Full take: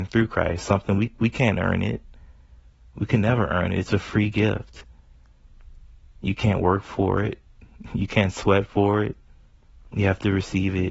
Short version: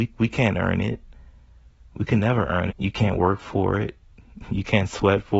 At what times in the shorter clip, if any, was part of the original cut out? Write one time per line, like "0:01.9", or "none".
0:02.7